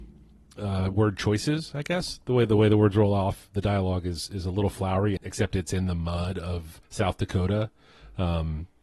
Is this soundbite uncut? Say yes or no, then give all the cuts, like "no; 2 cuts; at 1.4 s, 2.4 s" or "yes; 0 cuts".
no; 2 cuts; at 5.2 s, 6.8 s